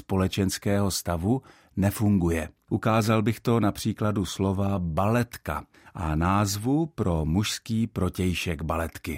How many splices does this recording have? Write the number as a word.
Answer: one